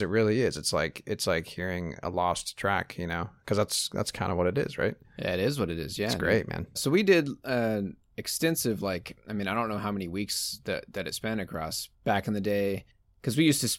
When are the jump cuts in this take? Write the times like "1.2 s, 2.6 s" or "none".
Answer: 6.8 s, 11.9 s